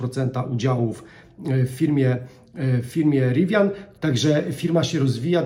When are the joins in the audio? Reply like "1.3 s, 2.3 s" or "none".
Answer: 3.9 s